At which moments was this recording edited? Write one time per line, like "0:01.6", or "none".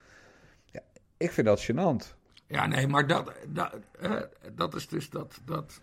none

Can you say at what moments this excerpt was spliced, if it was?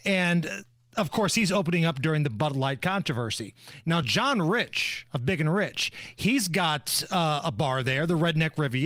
none

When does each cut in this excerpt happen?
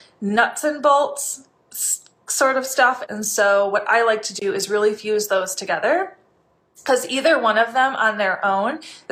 0:03.0

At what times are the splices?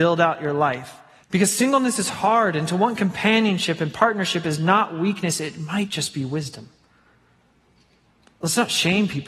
0:01.2

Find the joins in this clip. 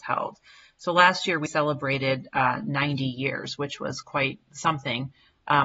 0:01.5

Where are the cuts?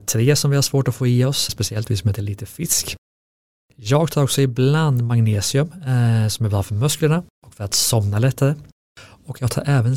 0:01.5

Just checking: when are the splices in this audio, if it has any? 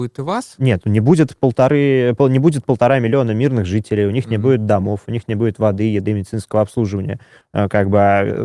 0:07.4

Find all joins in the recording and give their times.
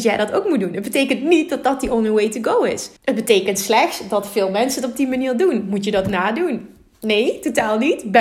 0:03.0

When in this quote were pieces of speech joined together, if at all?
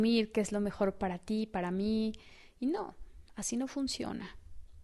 none

